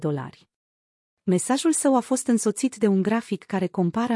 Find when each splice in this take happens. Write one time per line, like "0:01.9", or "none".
0:01.2